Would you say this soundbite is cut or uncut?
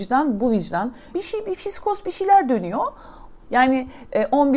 cut